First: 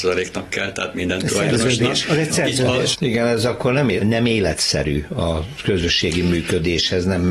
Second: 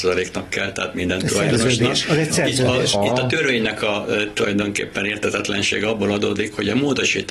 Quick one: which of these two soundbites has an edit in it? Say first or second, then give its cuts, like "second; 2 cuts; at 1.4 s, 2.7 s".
first; 2 cuts; at 2.9 s, 4.0 s